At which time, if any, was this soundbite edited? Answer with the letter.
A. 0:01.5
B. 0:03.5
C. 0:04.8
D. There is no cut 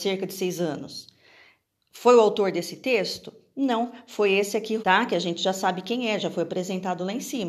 C